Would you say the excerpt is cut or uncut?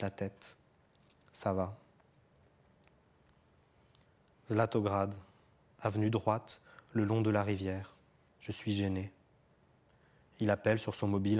cut